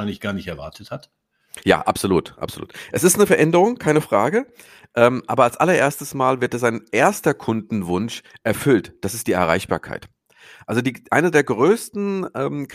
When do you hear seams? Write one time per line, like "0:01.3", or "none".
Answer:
none